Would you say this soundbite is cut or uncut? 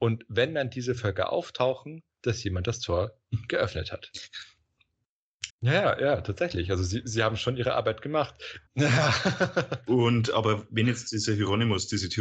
cut